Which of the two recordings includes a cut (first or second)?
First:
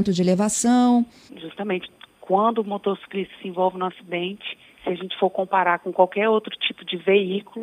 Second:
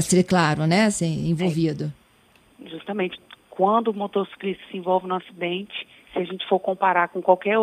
first